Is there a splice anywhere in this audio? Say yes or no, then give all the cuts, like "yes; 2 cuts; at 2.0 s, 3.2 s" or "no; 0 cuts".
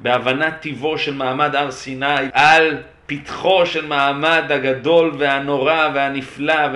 yes; 1 cut; at 2.3 s